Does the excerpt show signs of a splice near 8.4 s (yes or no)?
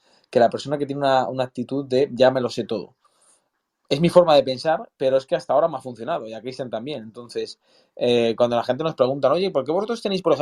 no